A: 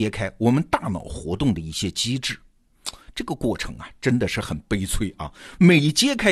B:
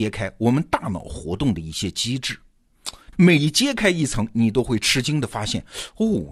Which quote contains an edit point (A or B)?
B